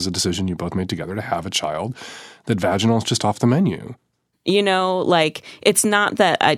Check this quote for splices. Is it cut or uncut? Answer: cut